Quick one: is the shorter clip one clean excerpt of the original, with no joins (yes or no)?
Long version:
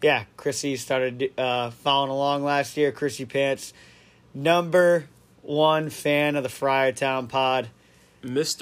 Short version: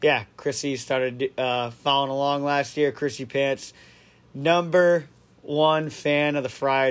yes